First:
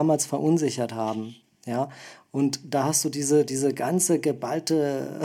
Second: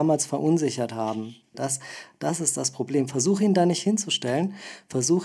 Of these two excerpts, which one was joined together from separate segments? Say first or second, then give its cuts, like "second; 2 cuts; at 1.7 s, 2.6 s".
second; 1 cut; at 1.5 s